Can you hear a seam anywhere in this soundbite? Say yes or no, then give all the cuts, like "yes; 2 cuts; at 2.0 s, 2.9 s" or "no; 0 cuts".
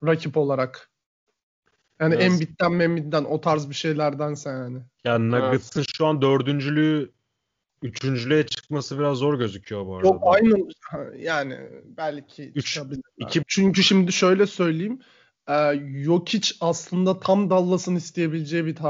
yes; 1 cut; at 13.4 s